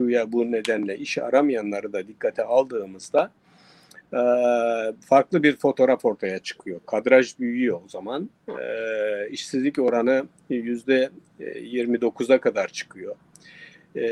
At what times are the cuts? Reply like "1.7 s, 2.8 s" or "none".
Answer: none